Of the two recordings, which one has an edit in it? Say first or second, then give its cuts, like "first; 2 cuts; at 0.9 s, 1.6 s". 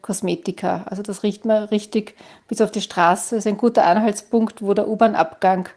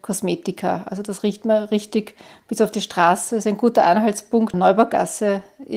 second; 1 cut; at 4.5 s